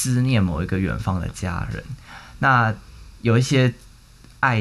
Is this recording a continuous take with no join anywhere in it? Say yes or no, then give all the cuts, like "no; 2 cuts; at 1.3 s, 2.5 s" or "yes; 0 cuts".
yes; 0 cuts